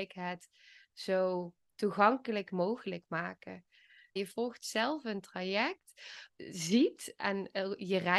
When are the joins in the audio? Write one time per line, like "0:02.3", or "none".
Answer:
0:04.2
0:06.3